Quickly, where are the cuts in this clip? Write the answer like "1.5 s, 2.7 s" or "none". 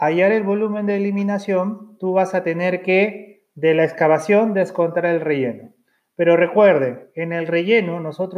none